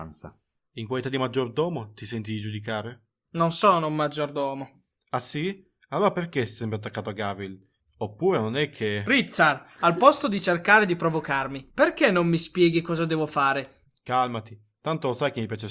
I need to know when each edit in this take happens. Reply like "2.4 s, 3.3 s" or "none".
7.8 s